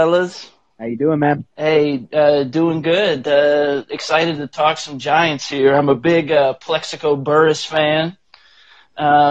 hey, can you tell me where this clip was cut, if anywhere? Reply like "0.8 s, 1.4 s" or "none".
1.5 s